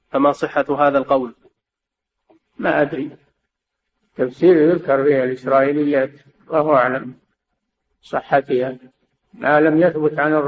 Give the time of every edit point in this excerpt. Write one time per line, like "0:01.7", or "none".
none